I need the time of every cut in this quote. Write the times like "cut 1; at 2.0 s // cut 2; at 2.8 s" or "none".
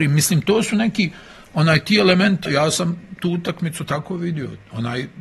cut 1; at 2.5 s